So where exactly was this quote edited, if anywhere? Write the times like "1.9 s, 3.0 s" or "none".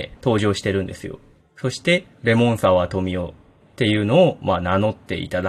1.4 s, 3.6 s